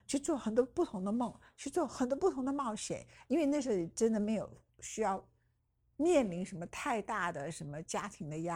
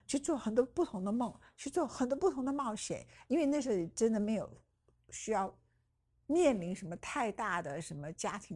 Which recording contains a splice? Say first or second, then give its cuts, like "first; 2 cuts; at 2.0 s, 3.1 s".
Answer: first; 1 cut; at 4.7 s